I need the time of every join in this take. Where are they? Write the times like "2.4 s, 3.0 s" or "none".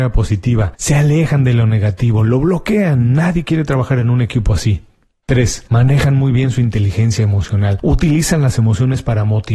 none